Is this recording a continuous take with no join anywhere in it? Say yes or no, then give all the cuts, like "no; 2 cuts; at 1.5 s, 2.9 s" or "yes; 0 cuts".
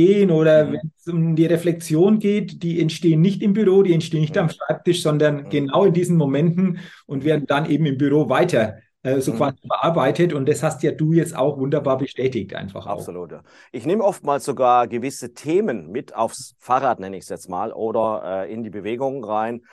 yes; 0 cuts